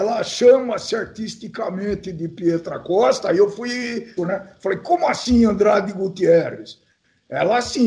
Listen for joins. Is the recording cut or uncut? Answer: cut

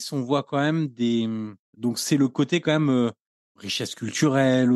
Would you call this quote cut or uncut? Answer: cut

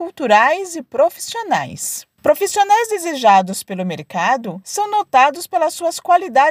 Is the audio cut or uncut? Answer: uncut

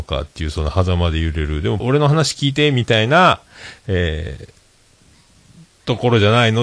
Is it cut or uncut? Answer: cut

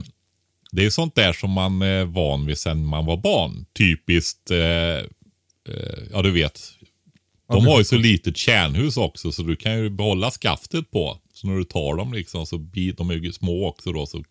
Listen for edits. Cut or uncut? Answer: cut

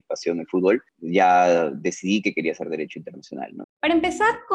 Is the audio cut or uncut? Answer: cut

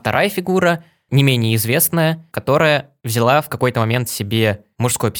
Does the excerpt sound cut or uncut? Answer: cut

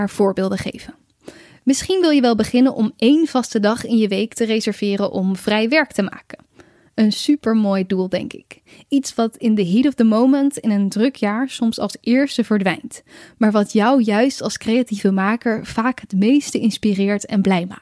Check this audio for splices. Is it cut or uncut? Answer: uncut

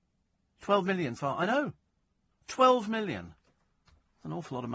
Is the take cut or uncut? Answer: cut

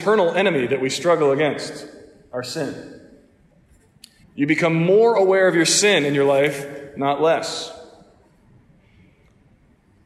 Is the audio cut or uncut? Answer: cut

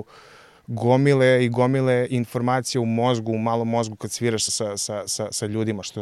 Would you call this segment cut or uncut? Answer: cut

